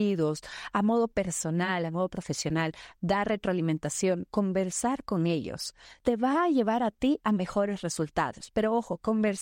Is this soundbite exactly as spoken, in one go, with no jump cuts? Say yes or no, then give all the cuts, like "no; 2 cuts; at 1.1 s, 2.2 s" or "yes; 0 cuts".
yes; 0 cuts